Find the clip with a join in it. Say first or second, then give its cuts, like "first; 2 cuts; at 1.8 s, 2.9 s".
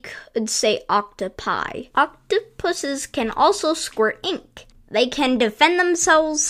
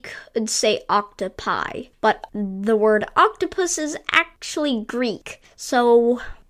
first; 1 cut; at 1.9 s